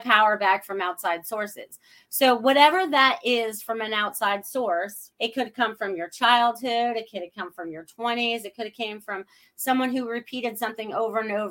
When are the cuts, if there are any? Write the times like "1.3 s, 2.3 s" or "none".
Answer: 5.1 s